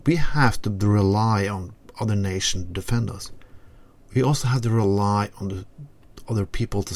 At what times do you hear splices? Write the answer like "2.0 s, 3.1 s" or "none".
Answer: none